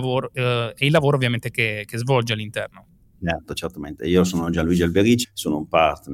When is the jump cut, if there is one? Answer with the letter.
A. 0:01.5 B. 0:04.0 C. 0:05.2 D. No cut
C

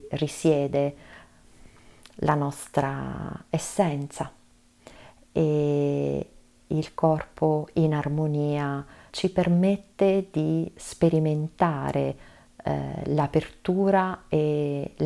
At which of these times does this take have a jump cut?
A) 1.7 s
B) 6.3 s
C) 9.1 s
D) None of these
C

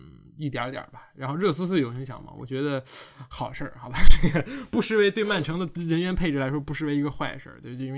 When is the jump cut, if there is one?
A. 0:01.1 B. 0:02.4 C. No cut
C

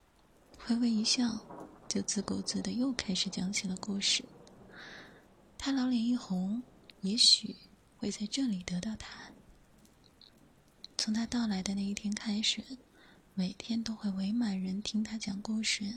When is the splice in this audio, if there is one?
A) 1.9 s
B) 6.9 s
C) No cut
B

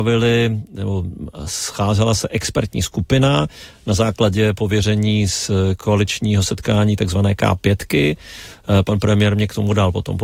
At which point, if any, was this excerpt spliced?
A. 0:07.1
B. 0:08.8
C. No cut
C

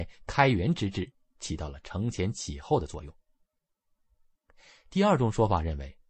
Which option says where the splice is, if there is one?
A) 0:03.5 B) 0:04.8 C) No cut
C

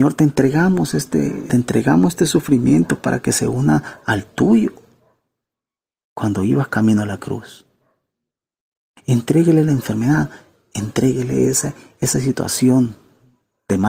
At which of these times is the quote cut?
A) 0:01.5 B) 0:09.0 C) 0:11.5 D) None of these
A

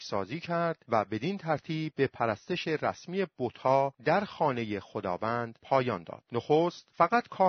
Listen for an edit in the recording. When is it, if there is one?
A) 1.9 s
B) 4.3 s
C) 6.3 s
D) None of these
C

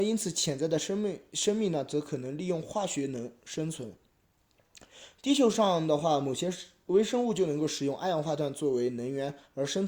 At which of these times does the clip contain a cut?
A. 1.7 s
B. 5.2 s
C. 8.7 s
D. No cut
D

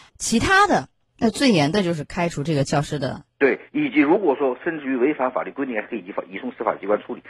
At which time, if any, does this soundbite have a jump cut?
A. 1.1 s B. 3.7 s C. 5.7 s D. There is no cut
A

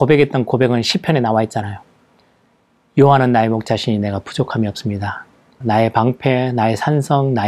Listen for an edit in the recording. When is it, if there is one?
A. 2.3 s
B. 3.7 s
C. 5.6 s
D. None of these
C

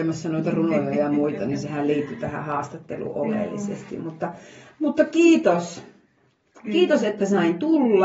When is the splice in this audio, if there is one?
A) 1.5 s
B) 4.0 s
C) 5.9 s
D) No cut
D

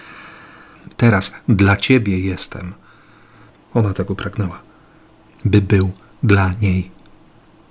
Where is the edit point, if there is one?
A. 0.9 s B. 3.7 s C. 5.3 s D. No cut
A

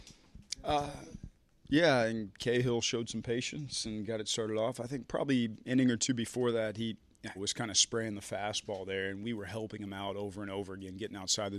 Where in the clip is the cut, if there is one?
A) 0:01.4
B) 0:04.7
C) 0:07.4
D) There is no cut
C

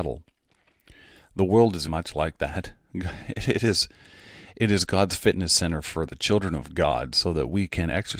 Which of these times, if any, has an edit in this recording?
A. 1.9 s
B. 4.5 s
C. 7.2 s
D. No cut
A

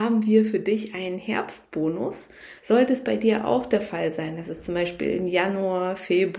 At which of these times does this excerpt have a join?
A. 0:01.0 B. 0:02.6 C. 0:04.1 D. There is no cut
B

